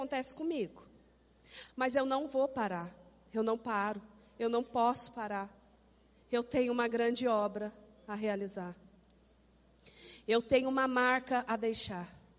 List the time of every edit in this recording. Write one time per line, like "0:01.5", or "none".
0:01.7